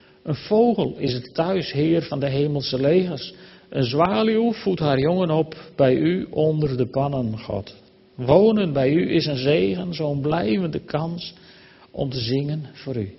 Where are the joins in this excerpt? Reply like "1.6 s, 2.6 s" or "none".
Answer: none